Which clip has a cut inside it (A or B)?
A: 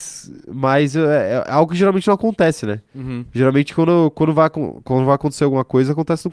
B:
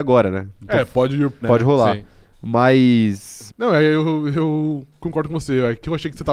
B